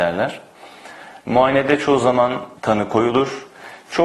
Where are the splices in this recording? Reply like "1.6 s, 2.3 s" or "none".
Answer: 2.6 s

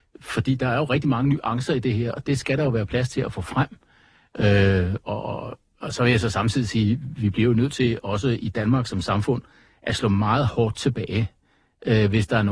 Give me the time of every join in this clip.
2.2 s

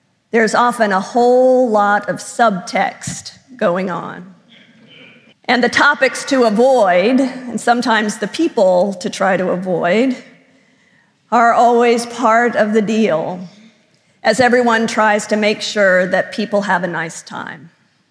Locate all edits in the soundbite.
5.3 s

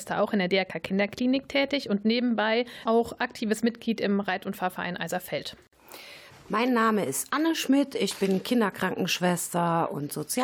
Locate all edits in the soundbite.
6.3 s

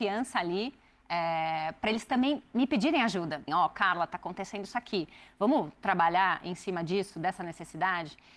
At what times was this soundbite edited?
3.5 s

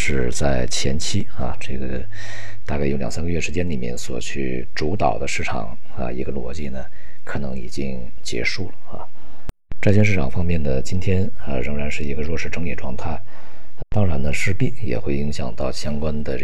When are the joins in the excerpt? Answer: 13.8 s

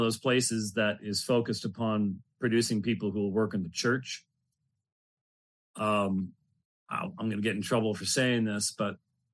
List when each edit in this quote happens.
none

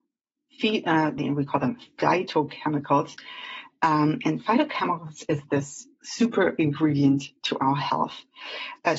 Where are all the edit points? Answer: 1.2 s

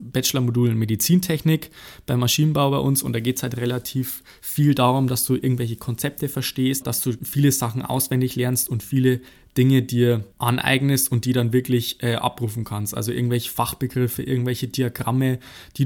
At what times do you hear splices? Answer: 6.8 s

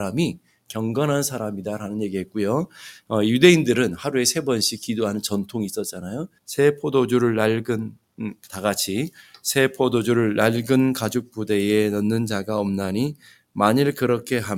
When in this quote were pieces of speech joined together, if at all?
6.4 s

